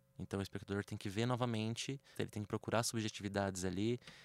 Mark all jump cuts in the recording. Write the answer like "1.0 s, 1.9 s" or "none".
2.1 s